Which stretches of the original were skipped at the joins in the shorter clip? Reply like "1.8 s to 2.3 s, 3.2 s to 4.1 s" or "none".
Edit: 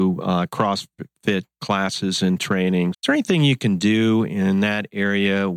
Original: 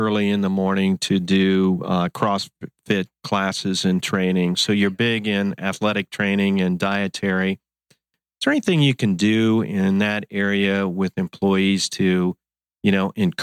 4.6 s to 8.3 s